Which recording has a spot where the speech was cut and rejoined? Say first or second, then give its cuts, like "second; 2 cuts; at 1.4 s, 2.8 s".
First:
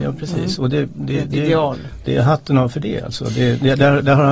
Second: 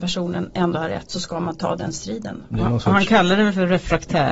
second; 1 cut; at 2.5 s